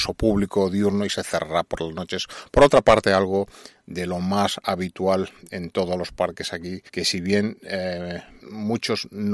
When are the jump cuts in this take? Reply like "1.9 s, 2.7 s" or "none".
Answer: 6.9 s, 8.4 s